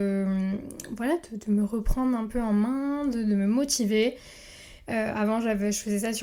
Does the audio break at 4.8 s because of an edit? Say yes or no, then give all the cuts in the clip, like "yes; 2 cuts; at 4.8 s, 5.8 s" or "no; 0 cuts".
yes; 1 cut; at 4.8 s